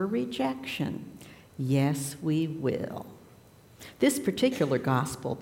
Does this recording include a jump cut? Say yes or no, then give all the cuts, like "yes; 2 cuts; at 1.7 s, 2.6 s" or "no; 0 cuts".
no; 0 cuts